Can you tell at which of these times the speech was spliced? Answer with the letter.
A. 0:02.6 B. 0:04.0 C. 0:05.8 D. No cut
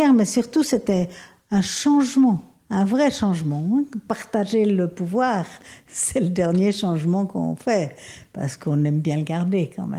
A